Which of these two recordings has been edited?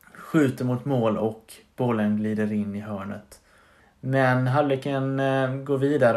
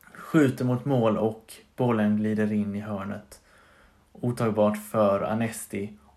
first; 1 cut; at 3.8 s

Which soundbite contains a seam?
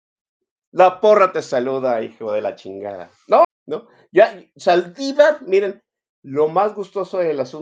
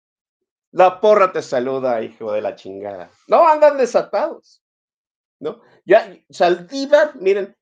first; 1 cut; at 3.4 s

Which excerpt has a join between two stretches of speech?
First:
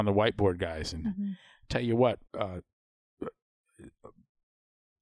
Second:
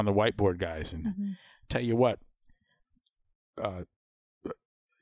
first; 1 cut; at 2.3 s

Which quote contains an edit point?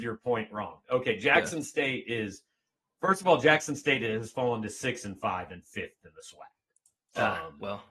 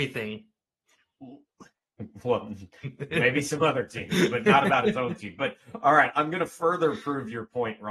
second; 1 cut; at 3.1 s

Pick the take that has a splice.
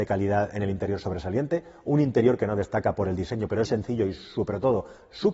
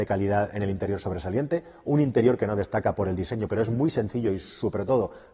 first; 1 cut; at 3.7 s

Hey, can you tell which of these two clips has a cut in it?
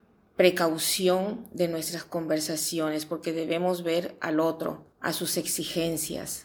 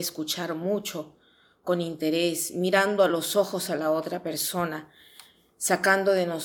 first; 1 cut; at 4.9 s

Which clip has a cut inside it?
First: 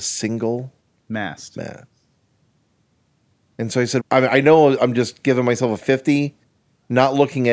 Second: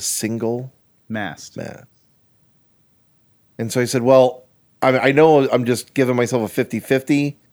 first; 2 cuts; at 4.0 s, 5.8 s

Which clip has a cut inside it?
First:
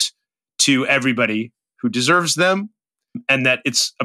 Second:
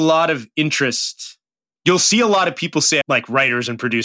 second; 1 cut; at 3.0 s

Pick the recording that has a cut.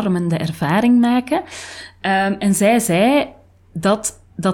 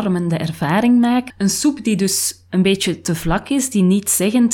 second; 1 cut; at 1.3 s

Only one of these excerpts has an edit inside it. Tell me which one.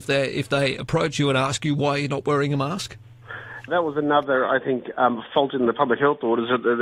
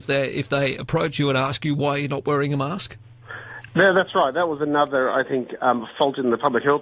first; 1 cut; at 3.7 s

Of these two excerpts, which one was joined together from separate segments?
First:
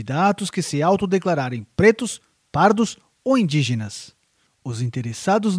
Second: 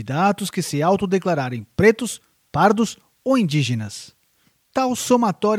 first; 1 cut; at 4.5 s

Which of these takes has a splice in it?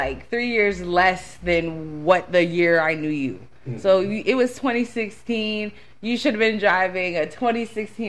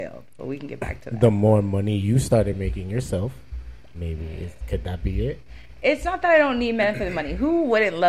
second; 1 cut; at 3.9 s

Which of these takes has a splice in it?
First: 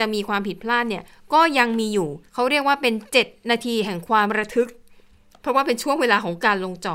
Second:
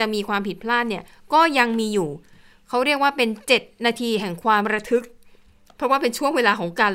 first; 1 cut; at 2.3 s

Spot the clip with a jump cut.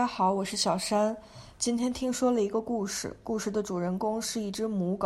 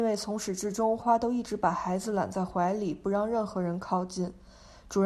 second; 1 cut; at 1.0 s

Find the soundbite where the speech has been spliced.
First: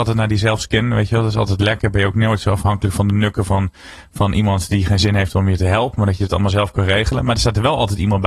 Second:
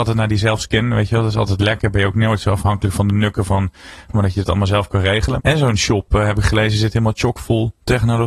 second; 2 cuts; at 4.1 s, 5.4 s

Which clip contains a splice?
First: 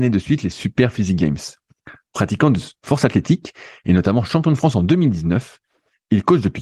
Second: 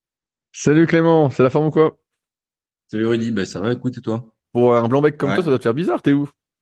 second; 1 cut; at 4.4 s

